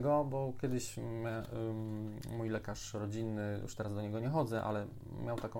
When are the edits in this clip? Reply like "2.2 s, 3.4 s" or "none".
none